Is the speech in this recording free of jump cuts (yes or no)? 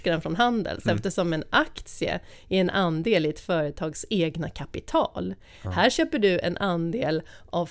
yes